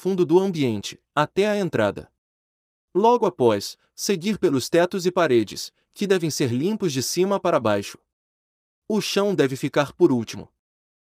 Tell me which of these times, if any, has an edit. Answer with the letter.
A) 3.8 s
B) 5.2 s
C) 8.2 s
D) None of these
D